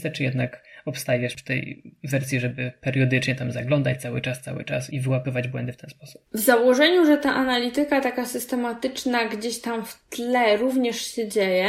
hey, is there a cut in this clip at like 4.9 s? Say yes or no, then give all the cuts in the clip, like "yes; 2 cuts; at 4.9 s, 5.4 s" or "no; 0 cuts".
yes; 1 cut; at 4.9 s